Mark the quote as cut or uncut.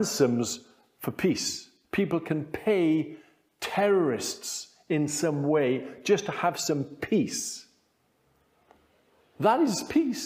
cut